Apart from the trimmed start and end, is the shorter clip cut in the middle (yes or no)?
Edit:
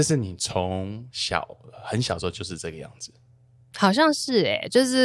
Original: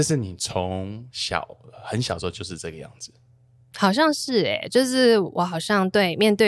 no